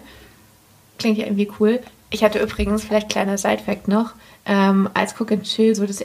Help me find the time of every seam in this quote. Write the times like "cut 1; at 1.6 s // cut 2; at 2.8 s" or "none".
none